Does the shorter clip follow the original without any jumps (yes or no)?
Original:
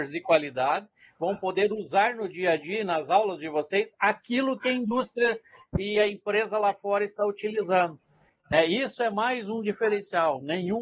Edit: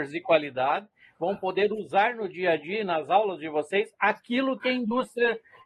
yes